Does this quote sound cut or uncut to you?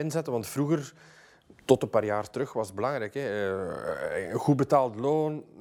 uncut